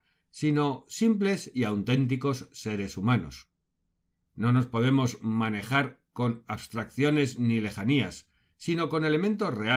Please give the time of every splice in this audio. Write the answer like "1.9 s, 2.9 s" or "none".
4.2 s